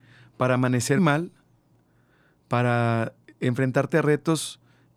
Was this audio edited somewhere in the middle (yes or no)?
yes